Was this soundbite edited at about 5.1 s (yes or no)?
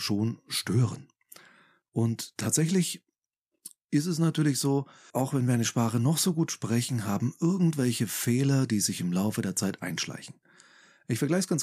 yes